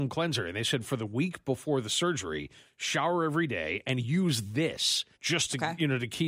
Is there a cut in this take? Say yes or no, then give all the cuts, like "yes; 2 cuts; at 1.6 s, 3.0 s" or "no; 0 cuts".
yes; 1 cut; at 5.1 s